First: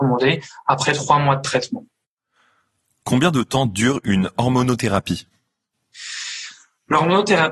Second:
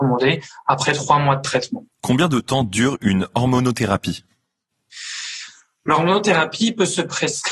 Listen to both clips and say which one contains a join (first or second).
second